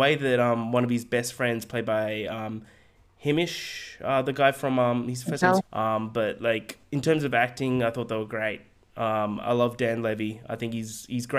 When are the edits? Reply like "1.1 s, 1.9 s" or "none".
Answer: 5.6 s

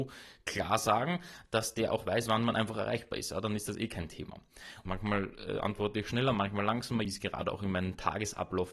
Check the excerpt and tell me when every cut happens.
4.9 s, 7.1 s

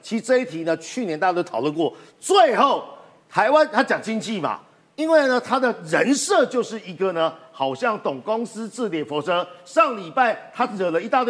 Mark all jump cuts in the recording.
none

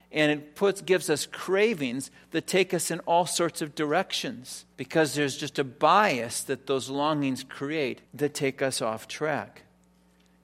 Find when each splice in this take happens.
4.7 s, 8.1 s

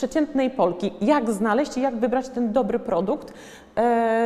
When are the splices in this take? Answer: none

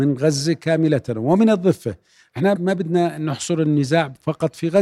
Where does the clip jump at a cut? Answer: 2.6 s

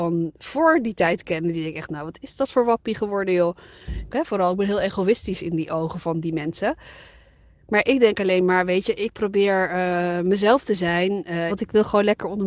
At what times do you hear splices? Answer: 4.1 s, 11.5 s

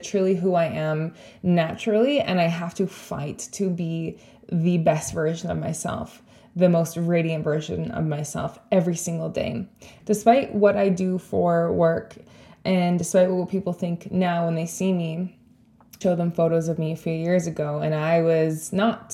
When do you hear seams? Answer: 10.0 s, 16.0 s

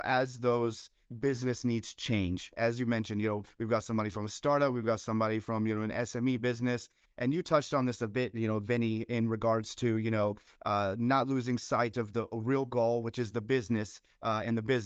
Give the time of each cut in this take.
7.0 s

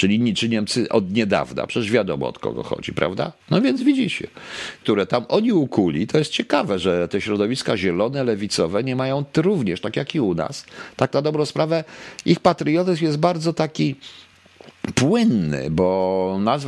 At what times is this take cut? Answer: 3.4 s, 4.8 s

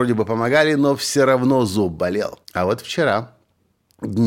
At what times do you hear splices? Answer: 2.4 s

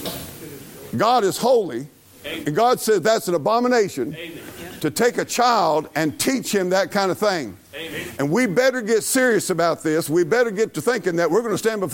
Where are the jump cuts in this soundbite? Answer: 0.9 s

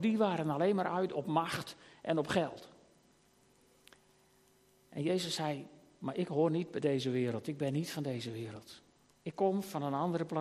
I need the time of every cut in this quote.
none

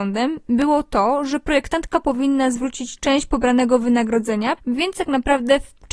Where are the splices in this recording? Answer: 4.6 s

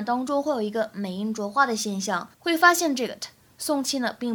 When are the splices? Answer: 2.3 s

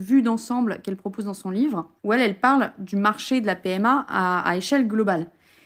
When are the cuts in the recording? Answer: 2.0 s

